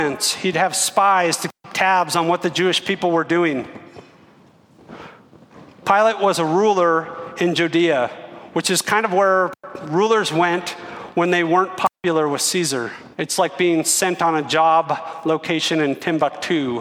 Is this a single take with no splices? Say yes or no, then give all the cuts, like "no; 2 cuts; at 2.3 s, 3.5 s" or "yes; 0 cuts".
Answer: no; 1 cut; at 13.1 s